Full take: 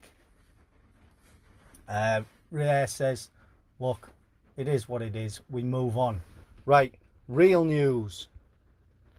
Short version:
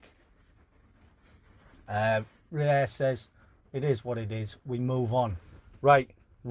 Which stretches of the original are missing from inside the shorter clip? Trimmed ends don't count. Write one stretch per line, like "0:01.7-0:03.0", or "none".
0:03.6-0:04.5